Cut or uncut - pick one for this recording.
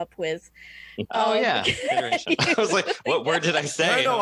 cut